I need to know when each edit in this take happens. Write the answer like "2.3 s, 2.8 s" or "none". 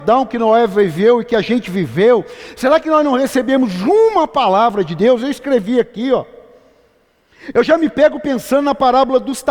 none